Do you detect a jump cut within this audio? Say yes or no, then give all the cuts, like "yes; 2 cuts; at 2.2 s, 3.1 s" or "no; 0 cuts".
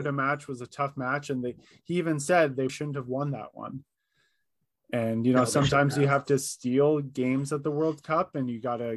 yes; 1 cut; at 2.7 s